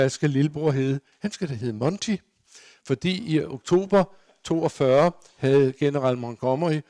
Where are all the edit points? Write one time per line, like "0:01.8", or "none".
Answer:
none